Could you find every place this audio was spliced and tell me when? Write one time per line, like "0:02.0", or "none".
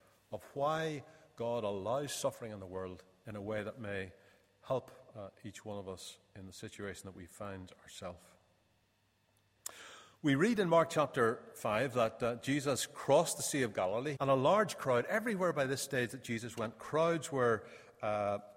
0:14.2